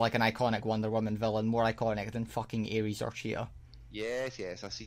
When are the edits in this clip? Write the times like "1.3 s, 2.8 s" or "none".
none